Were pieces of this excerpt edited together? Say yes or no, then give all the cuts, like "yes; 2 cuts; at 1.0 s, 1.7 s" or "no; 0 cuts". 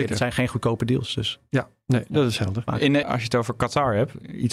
yes; 1 cut; at 3.0 s